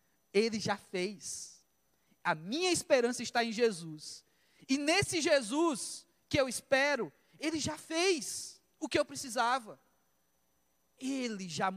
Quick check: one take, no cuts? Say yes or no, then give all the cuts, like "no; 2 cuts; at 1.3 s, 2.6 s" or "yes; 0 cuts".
yes; 0 cuts